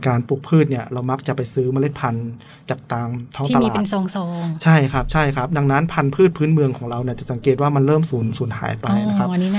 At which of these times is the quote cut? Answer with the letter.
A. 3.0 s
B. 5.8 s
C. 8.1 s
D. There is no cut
D